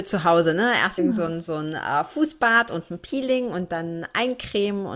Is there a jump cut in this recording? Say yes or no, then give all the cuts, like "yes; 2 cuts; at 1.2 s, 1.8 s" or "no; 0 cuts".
no; 0 cuts